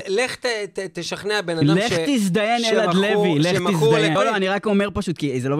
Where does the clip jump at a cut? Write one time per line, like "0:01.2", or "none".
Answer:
0:04.2